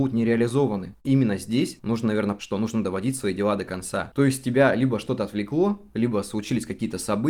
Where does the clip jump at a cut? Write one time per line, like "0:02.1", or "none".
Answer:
0:01.0
0:02.4
0:04.1